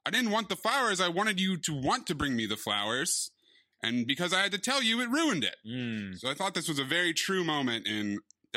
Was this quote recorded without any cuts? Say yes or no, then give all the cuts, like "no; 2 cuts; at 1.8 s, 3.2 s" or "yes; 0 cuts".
yes; 0 cuts